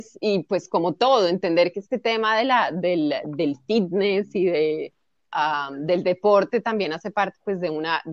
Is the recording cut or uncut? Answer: uncut